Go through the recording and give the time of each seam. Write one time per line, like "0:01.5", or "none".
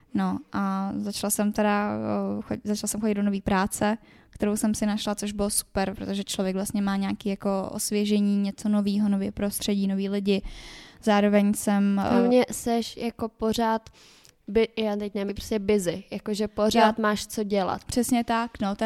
0:15.3